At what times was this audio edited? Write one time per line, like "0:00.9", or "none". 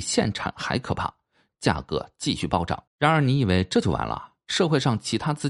0:01.5
0:02.9